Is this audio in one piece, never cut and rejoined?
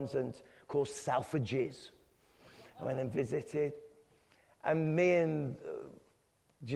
yes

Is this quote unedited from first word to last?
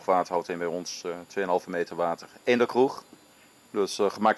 yes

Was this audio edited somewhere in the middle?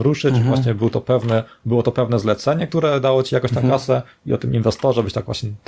no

